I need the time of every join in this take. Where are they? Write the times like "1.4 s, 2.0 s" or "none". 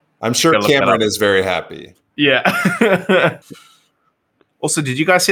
3.4 s